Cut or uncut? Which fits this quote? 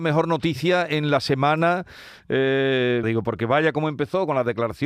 cut